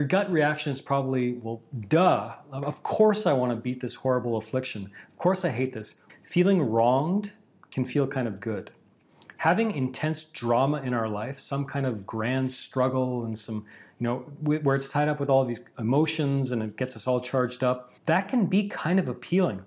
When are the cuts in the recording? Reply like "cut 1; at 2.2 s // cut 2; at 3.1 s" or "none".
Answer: cut 1; at 6.1 s // cut 2; at 18.0 s